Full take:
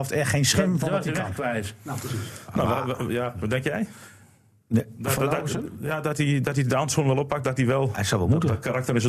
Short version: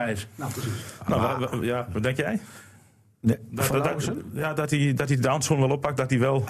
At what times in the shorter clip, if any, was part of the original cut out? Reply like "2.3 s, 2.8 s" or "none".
none